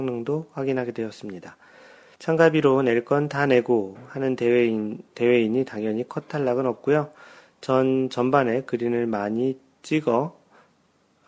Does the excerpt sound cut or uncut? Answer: cut